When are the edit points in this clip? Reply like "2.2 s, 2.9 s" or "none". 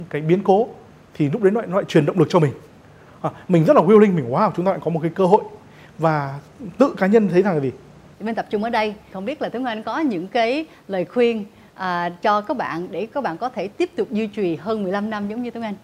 8.1 s